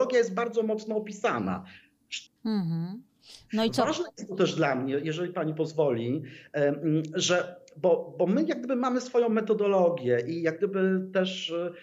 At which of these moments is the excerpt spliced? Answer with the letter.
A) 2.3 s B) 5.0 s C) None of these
A